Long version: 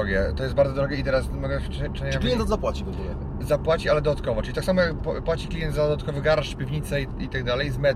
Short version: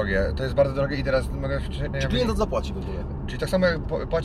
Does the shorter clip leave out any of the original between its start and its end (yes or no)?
yes